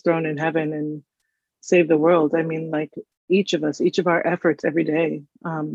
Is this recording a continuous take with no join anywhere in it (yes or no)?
yes